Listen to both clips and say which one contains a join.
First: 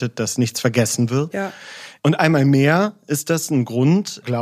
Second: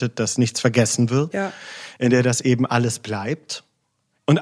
first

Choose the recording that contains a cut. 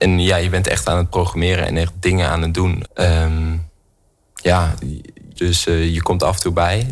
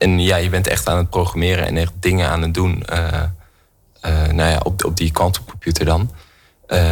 first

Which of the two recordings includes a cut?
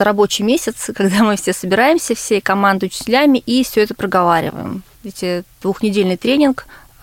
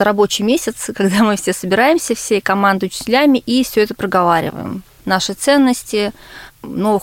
first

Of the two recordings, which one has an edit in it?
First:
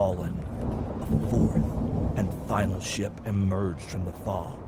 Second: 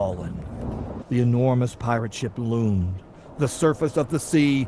second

